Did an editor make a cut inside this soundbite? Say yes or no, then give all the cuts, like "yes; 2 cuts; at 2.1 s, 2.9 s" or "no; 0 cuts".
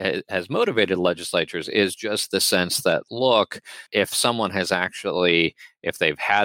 yes; 1 cut; at 3.9 s